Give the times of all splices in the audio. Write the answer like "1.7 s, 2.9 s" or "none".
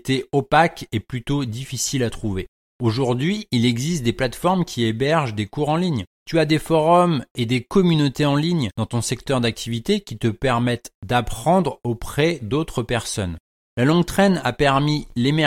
6.2 s